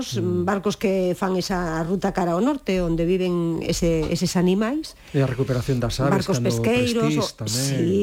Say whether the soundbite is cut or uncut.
uncut